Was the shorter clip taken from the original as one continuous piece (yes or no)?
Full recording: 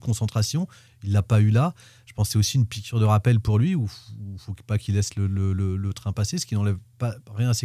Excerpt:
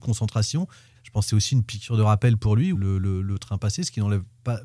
no